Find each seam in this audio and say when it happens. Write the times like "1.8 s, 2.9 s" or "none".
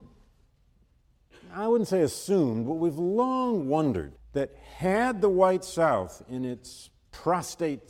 4.1 s